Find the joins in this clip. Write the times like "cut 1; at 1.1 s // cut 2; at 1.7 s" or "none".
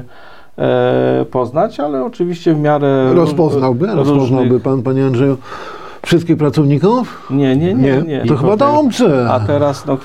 cut 1; at 8.2 s